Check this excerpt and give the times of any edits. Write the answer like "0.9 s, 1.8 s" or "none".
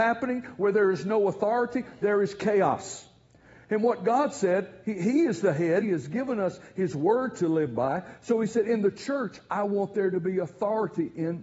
5.8 s